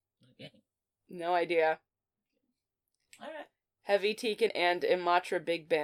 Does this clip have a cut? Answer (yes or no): yes